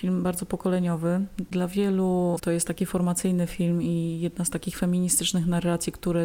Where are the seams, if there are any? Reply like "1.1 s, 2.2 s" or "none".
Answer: 2.4 s